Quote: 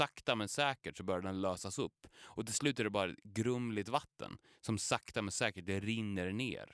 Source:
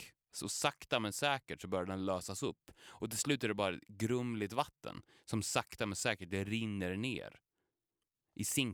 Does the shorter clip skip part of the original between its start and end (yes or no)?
no